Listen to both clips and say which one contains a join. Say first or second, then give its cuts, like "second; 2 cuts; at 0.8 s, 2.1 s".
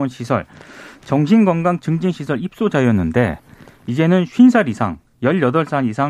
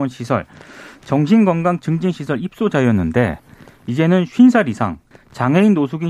second; 1 cut; at 5.1 s